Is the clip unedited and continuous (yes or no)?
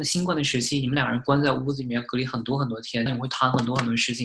no